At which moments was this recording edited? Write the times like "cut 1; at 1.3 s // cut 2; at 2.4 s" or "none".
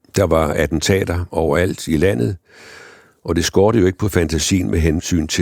none